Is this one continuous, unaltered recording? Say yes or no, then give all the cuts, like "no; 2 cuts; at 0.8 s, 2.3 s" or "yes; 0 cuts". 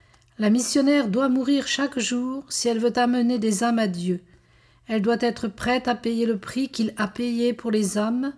yes; 0 cuts